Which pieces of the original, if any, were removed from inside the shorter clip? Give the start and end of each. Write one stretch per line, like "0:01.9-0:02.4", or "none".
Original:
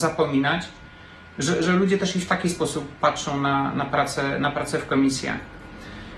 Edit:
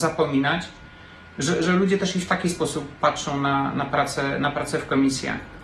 none